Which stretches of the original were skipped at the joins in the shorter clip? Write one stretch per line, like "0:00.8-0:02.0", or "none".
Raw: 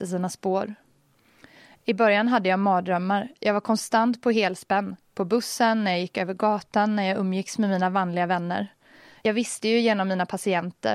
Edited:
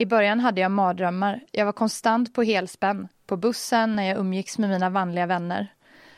0:05.8-0:06.9

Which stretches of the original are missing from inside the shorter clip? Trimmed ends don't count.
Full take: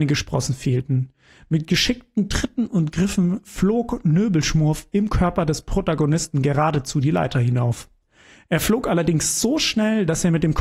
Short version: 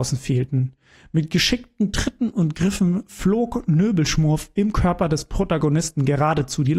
none

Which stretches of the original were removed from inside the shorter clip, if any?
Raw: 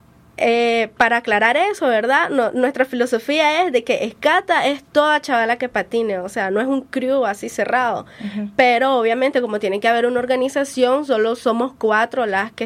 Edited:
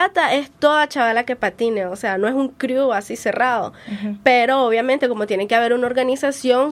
none

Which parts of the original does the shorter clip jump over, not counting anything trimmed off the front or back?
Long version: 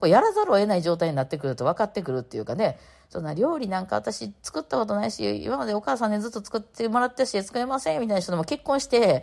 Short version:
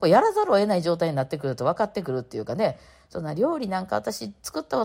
none

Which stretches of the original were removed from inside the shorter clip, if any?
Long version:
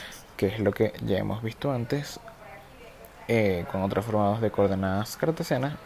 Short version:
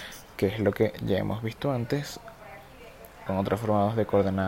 0:03.3-0:03.7

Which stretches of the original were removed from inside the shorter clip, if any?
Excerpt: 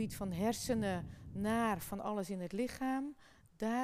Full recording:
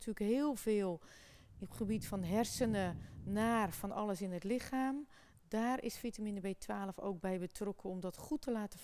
none

